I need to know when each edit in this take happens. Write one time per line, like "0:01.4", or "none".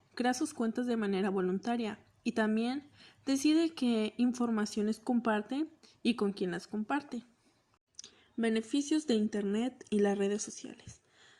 none